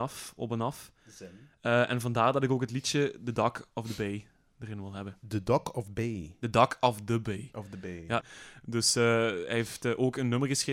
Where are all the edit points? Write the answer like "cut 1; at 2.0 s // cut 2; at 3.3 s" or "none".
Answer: cut 1; at 8.2 s